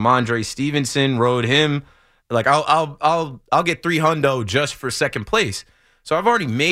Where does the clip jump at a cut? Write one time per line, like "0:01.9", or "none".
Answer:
0:02.2